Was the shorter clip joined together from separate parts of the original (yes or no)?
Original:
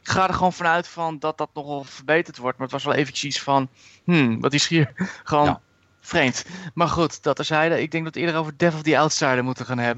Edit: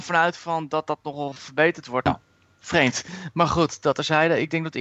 yes